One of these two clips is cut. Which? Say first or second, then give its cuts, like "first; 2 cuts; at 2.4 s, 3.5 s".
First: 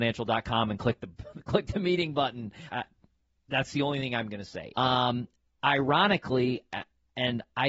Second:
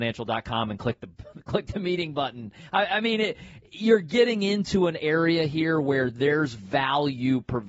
first; 2 cuts; at 2.7 s, 4.7 s